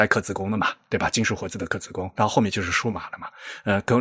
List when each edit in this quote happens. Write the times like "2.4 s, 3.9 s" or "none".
none